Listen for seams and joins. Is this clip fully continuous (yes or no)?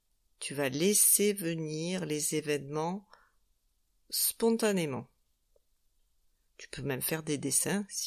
no